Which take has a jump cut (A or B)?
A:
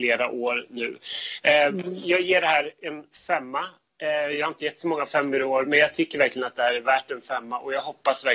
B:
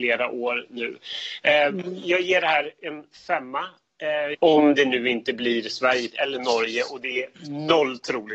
B